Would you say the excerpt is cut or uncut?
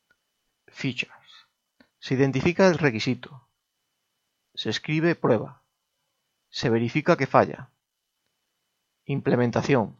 cut